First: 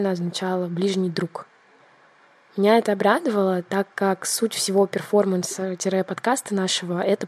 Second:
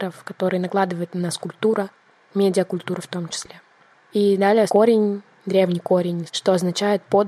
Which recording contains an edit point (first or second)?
second